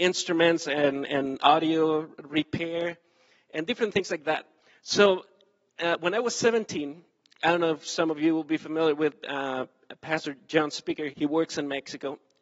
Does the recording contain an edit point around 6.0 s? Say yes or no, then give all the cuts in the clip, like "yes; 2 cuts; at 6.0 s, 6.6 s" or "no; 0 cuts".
no; 1 cut; at 11.1 s